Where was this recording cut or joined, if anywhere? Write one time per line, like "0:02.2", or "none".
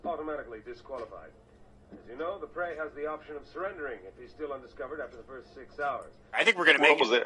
0:06.3